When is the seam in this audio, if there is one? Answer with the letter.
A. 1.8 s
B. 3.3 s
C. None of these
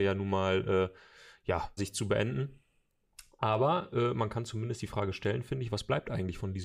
A